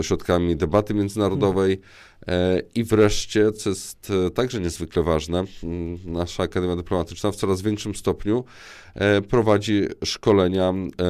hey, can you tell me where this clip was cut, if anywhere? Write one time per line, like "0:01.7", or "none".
none